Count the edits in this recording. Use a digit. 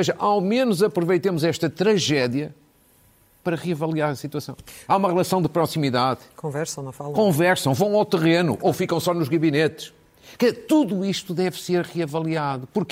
1